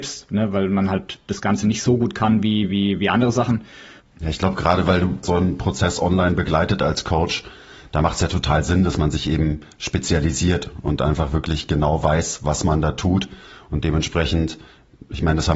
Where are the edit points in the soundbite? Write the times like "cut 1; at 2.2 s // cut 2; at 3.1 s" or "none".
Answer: cut 1; at 4.0 s // cut 2; at 5.2 s